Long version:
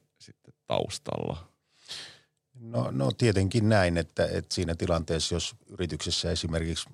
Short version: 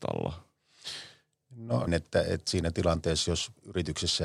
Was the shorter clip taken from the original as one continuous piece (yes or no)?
no